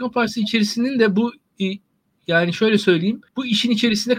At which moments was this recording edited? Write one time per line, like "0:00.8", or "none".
0:03.3